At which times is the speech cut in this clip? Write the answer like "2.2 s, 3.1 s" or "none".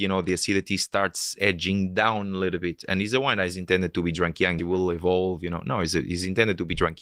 4.6 s